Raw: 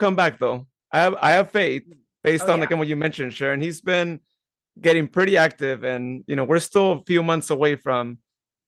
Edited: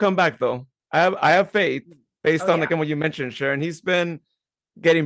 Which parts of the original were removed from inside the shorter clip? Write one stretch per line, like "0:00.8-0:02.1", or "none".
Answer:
none